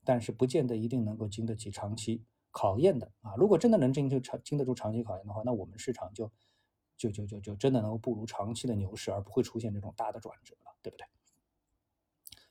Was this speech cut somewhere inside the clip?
no; 0 cuts

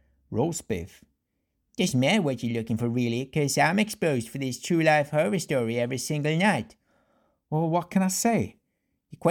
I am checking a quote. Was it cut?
no; 0 cuts

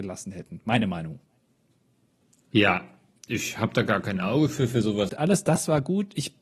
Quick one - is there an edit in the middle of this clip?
yes; 1 cut; at 5.1 s

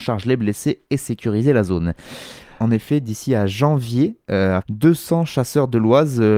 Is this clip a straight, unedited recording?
no; 2 cuts; at 2.6 s, 4.6 s

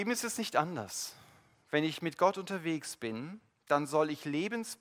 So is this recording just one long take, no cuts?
yes; 0 cuts

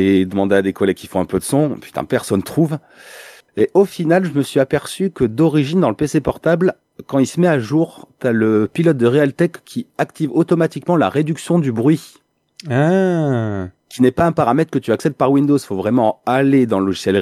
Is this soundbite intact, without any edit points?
yes; 0 cuts

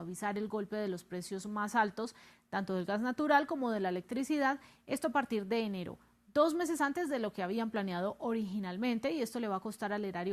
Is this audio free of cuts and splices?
yes; 0 cuts

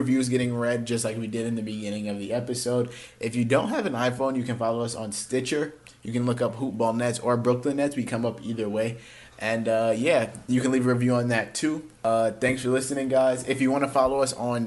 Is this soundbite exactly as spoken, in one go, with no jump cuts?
yes; 0 cuts

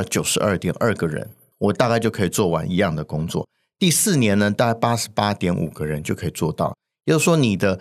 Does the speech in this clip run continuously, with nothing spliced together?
yes; 0 cuts

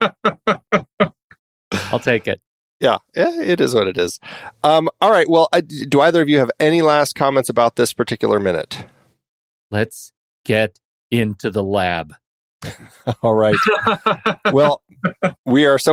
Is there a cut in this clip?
no; 0 cuts

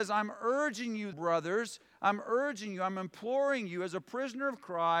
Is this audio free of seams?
no; 1 cut; at 1.1 s

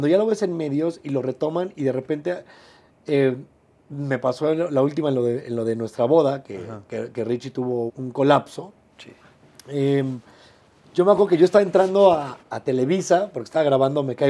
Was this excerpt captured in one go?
no; 2 cuts; at 7.9 s, 12.4 s

